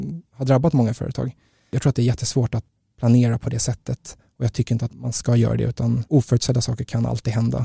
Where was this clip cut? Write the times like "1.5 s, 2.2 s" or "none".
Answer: 4.9 s